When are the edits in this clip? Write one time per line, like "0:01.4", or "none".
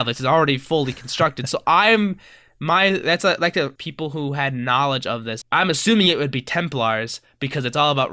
0:03.8
0:05.4